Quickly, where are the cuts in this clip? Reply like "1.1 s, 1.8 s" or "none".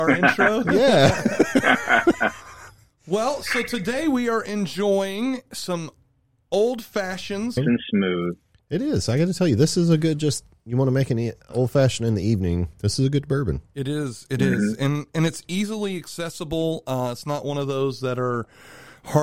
7.6 s

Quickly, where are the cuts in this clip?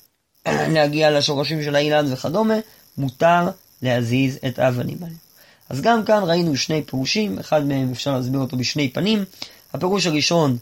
none

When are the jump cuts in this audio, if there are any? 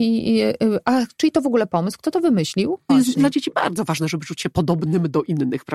2.9 s

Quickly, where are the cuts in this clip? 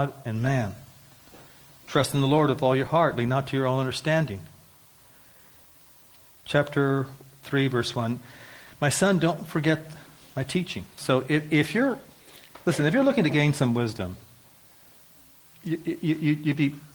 6.4 s, 11.0 s

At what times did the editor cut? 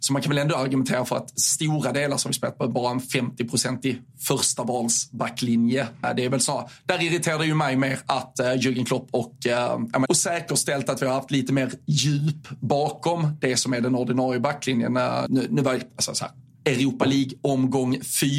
6.0 s, 10.1 s, 15.3 s

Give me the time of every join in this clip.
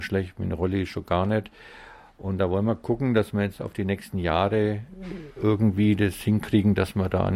none

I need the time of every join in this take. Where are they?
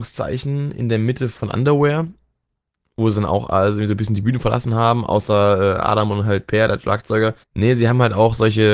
7.4 s

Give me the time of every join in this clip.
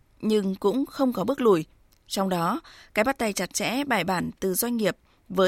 1.9 s

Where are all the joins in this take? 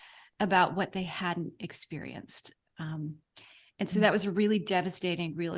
none

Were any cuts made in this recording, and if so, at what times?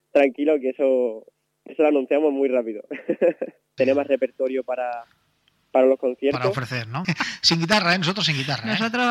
3.8 s, 7.0 s

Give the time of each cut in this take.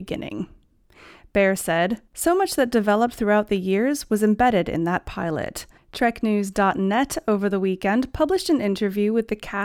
2.1 s, 5.8 s

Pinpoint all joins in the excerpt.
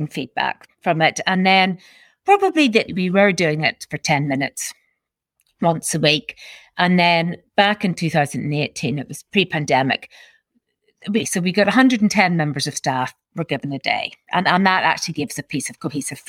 2.9 s

